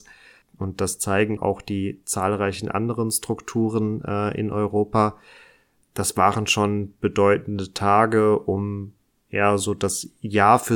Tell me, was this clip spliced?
yes; 1 cut; at 1.4 s

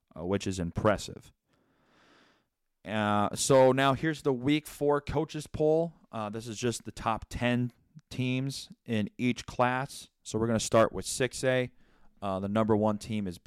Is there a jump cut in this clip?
no; 0 cuts

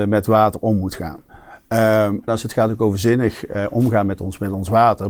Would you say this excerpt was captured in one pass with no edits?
no; 1 cut; at 2.3 s

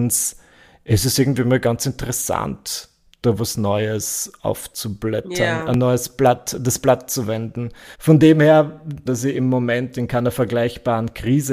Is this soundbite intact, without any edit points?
no; 2 cuts; at 7.9 s, 9.1 s

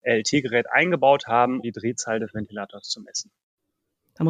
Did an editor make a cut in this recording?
yes; 1 cut; at 1.6 s

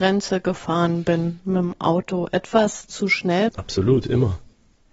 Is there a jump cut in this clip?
yes; 1 cut; at 3.5 s

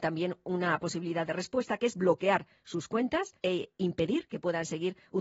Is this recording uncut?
no; 1 cut; at 3.4 s

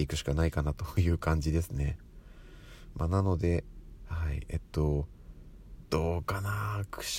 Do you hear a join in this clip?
no; 0 cuts

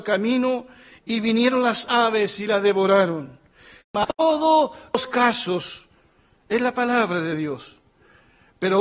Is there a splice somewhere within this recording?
yes; 1 cut; at 3.8 s

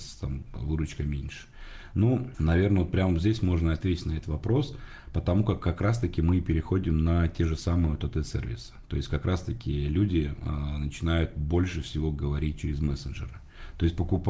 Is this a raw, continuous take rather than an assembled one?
yes; 0 cuts

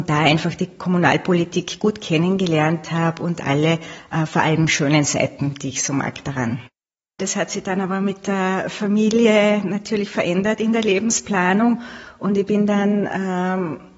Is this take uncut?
no; 1 cut; at 7.2 s

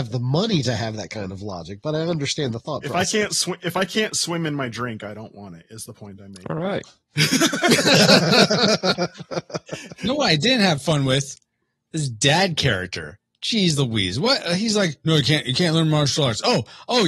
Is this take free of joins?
no; 1 cut; at 6.4 s

